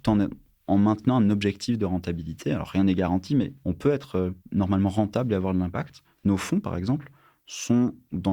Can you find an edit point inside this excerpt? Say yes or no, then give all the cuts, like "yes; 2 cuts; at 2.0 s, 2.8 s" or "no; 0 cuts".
yes; 1 cut; at 4.4 s